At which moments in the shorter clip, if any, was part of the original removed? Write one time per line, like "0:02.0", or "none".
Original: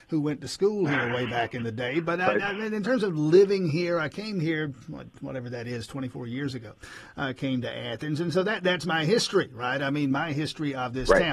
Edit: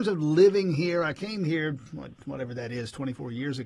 none

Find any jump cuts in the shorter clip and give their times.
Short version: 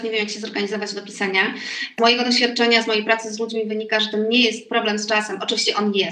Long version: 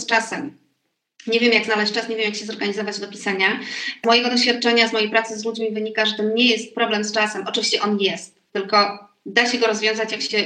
none

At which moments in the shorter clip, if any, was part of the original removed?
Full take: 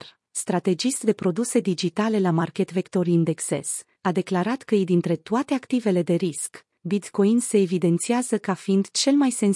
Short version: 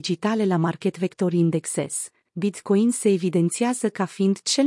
0:02.2

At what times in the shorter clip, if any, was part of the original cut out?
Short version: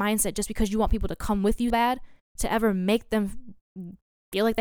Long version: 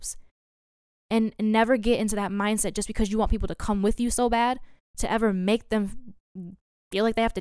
0:01.7

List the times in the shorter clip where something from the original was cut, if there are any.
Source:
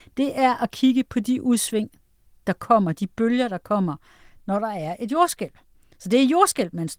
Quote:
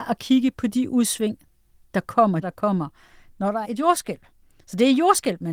0:02.4
0:03.6

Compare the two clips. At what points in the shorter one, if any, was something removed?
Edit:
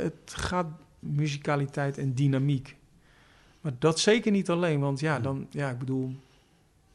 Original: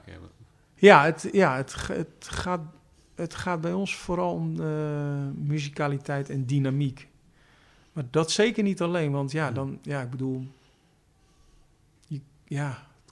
0:01.0

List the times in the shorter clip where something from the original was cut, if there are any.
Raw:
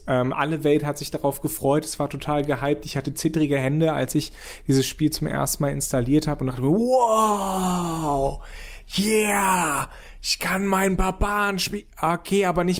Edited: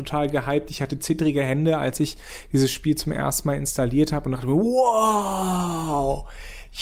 none

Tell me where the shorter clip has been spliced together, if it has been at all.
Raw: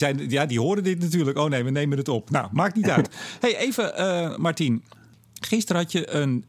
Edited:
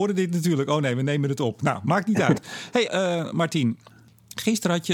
0:02.9

